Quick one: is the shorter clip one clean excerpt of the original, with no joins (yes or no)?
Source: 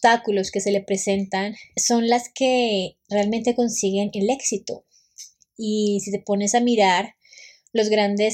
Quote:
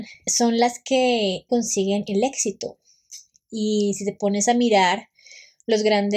no